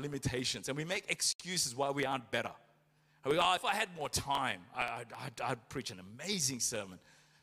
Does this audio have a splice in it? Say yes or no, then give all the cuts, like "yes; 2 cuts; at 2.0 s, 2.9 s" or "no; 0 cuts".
no; 0 cuts